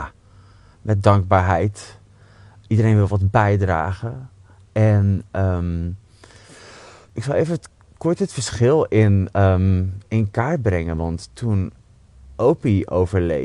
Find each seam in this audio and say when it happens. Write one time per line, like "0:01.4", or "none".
none